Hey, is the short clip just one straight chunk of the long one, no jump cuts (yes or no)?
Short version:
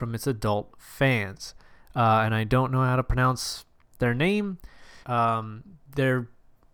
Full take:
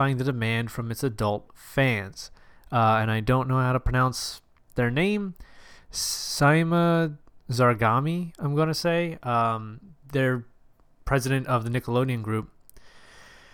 no